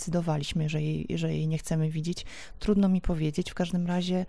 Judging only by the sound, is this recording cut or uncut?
uncut